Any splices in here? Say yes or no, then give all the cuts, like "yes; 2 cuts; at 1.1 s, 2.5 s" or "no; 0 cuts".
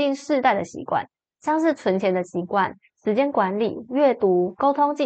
no; 0 cuts